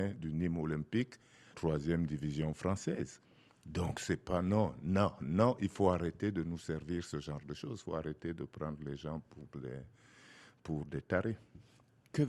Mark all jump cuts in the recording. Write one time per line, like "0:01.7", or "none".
0:01.5